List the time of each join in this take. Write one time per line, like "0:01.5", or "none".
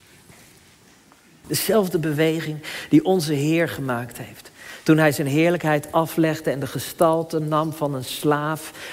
0:01.4